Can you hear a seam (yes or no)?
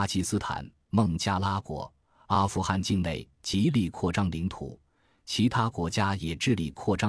no